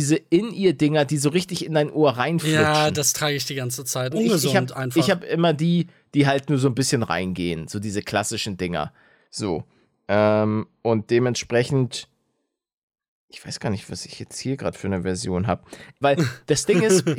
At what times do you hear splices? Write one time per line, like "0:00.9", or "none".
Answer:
0:04.1
0:16.0

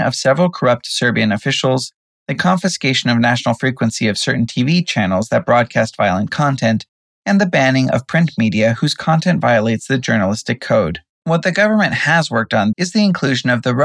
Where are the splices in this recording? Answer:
0:11.1
0:12.7

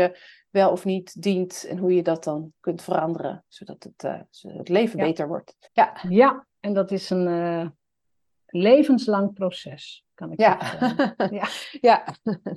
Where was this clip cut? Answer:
0:05.7

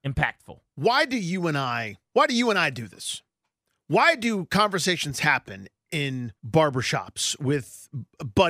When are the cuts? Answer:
0:02.1
0:06.4

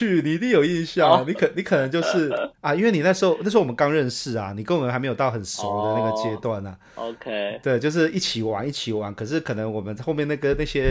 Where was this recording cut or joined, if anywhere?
0:02.5

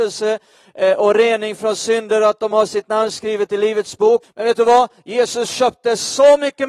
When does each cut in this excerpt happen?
0:04.2

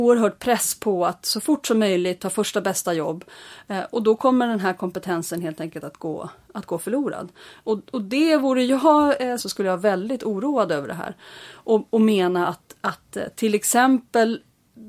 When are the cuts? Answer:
0:09.4

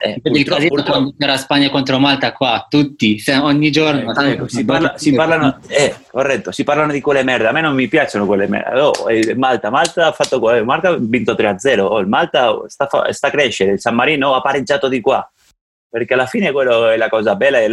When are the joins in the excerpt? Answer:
none

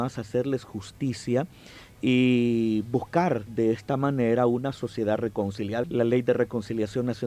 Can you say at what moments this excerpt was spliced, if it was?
0:05.8

